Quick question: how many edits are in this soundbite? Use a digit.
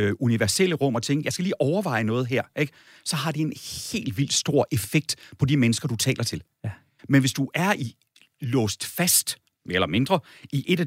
0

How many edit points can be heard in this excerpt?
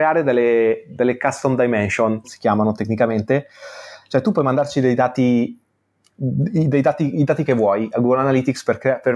1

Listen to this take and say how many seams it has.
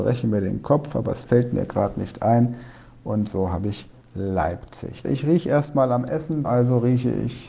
2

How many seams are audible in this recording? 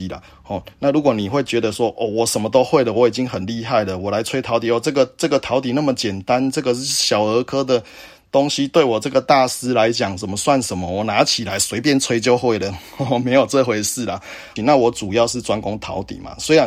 1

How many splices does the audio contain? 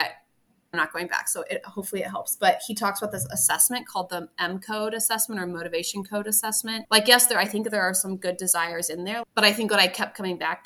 2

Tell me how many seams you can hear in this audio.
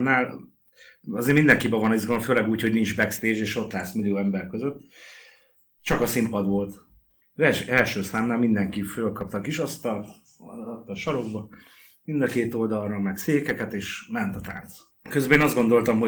2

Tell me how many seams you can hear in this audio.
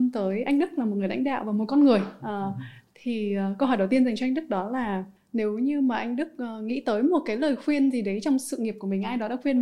1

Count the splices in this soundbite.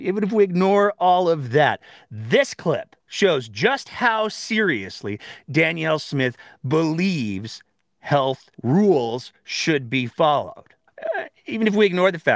3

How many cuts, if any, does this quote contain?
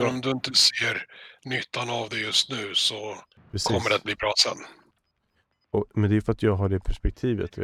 0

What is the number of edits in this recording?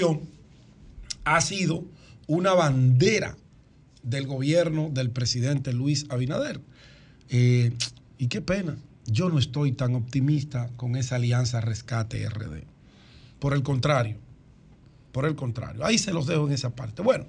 2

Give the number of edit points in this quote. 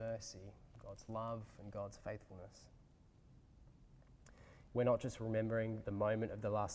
2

